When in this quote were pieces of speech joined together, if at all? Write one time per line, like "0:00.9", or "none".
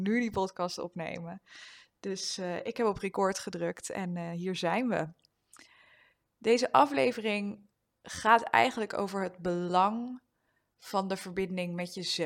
none